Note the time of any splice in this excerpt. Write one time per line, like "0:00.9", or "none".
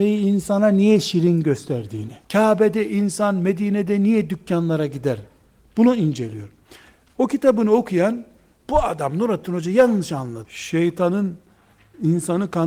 0:02.2
0:10.4